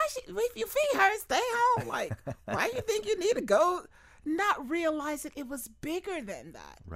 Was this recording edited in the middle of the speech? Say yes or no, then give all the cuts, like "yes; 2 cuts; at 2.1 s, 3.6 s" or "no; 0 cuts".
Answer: no; 0 cuts